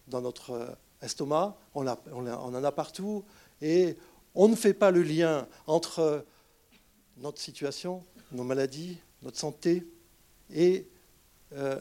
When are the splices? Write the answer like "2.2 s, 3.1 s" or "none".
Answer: none